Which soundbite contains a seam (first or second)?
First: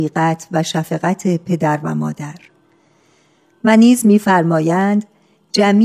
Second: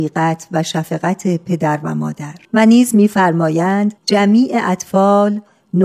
second